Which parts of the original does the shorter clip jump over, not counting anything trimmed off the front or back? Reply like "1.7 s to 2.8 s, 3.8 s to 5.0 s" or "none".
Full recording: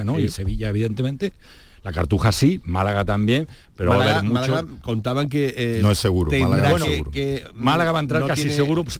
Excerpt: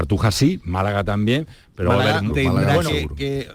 4.3 s to 6.2 s